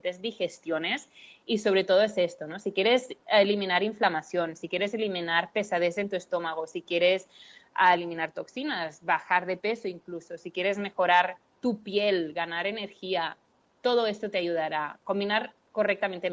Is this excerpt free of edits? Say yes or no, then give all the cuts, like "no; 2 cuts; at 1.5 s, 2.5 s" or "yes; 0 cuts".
yes; 0 cuts